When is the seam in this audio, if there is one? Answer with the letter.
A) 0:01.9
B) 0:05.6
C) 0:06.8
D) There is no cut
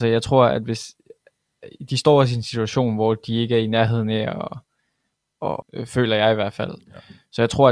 B